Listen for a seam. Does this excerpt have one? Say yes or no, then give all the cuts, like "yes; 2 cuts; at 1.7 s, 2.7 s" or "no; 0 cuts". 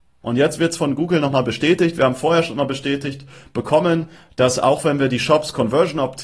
no; 0 cuts